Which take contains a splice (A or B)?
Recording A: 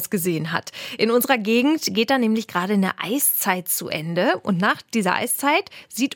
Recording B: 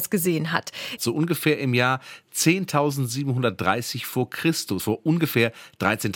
B